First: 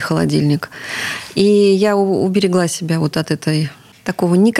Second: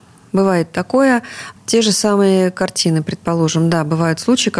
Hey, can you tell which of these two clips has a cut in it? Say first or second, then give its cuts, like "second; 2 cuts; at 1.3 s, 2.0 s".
second; 1 cut; at 1.6 s